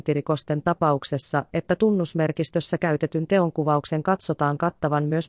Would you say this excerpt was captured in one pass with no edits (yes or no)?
yes